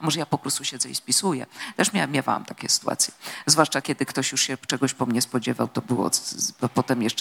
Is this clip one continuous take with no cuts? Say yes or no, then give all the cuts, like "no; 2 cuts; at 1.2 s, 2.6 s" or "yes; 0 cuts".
no; 1 cut; at 3.8 s